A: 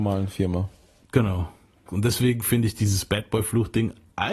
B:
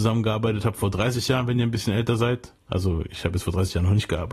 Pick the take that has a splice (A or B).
A